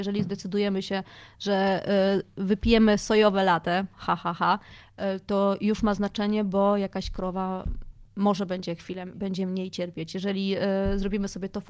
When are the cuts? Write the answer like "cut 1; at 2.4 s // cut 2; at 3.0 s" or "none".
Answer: cut 1; at 8.1 s // cut 2; at 9.1 s